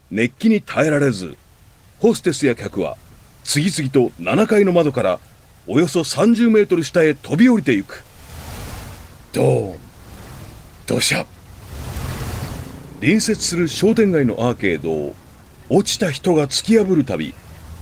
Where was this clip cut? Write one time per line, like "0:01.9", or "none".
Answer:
none